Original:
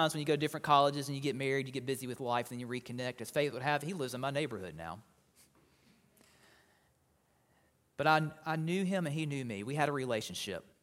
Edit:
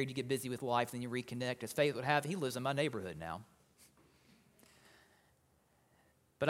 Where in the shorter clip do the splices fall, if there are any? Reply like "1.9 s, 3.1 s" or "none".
none